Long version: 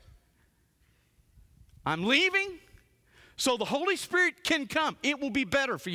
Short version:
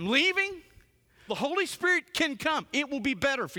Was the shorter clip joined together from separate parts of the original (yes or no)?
yes